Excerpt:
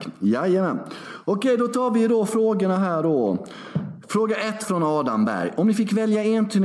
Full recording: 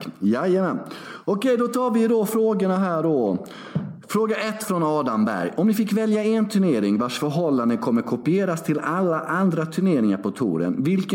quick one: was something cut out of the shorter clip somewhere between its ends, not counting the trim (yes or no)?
no